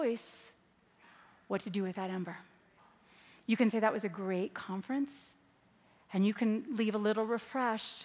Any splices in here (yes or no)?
no